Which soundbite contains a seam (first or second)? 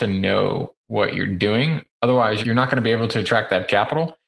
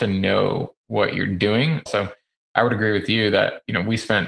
second